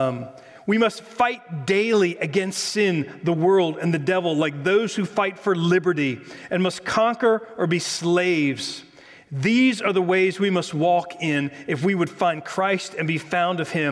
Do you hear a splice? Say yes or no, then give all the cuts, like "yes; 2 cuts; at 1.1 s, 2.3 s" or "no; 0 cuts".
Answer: no; 0 cuts